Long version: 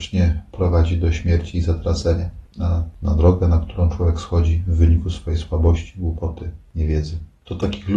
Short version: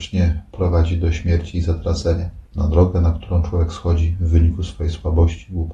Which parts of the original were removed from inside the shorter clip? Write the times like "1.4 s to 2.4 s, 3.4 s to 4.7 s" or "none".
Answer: 2.5 s to 3.0 s